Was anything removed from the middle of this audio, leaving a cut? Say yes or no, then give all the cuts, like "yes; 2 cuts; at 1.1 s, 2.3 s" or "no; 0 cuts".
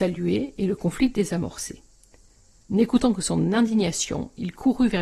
yes; 1 cut; at 2.6 s